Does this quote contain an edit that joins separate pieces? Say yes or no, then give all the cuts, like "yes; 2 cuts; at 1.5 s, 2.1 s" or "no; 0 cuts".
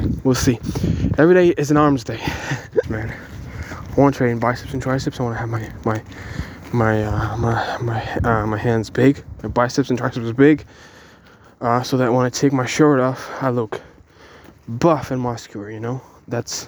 yes; 1 cut; at 2.8 s